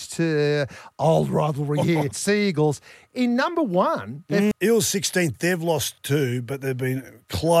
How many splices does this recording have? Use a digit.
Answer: 2